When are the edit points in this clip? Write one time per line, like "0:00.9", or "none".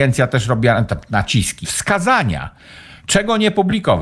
0:01.6

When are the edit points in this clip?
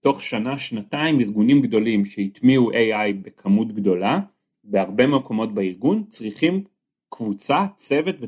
none

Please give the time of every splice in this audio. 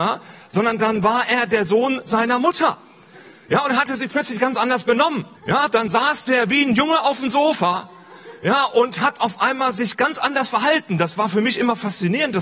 0:05.3

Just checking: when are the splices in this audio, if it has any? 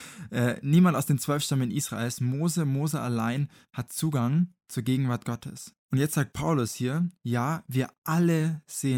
0:04.6
0:05.8

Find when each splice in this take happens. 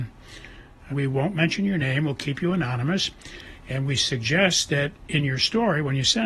0:00.9

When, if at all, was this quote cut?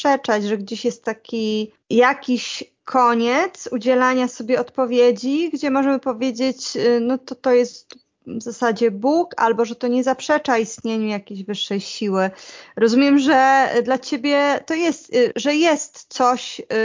0:15.3

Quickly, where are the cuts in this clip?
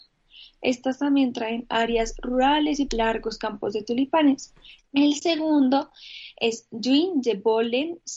0:02.9
0:04.8

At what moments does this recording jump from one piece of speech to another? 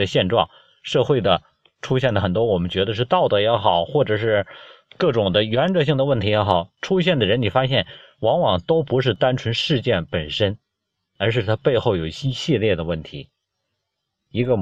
none

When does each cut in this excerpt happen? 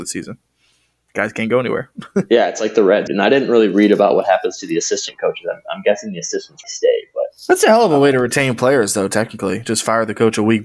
0:03.1
0:06.6

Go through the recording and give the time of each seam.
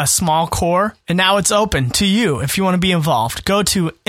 none

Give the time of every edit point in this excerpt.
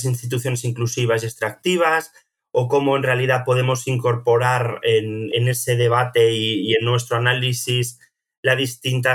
none

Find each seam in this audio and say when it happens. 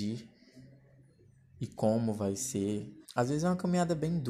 0:03.0

